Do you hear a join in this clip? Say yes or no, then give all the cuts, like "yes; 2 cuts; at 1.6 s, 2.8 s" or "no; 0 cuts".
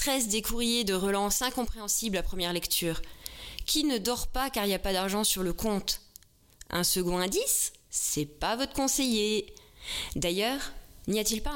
no; 0 cuts